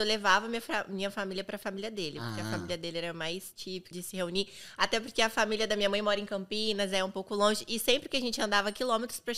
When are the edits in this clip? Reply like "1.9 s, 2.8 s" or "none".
3.9 s

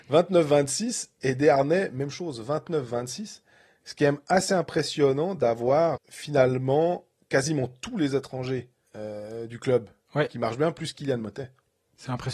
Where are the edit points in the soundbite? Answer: 6.0 s

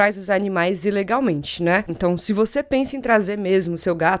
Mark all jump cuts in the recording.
1.9 s

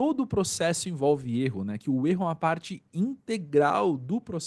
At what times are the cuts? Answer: none

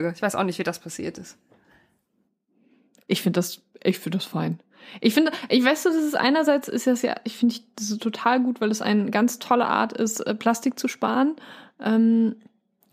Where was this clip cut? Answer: none

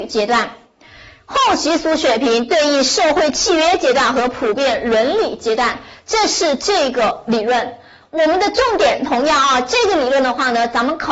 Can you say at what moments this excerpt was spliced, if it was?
none

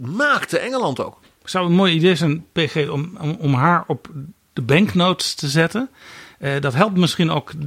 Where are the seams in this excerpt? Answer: none

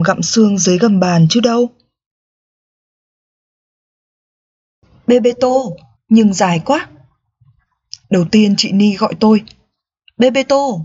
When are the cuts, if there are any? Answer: 6.0 s, 8.0 s

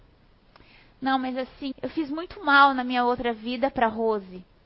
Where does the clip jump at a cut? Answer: 1.7 s

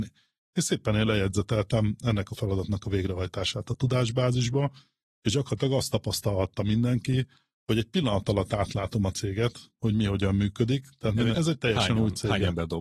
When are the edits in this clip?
11.3 s

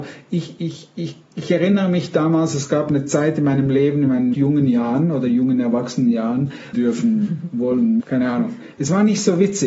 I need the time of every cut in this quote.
4.3 s, 6.7 s, 8.0 s

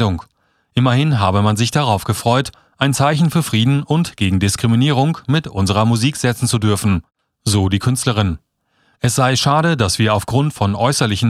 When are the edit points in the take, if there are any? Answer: none

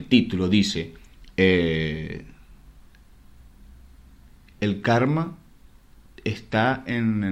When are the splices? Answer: none

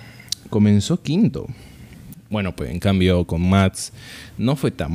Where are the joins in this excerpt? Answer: 2.1 s

